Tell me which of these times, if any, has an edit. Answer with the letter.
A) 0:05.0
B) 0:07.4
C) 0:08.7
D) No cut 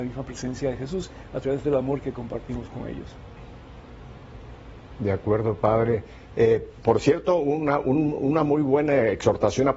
D